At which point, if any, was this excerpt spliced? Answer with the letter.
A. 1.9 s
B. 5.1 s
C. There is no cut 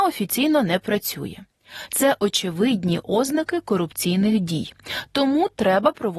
A